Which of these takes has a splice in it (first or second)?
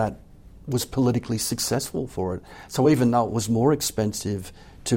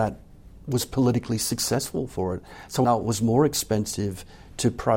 second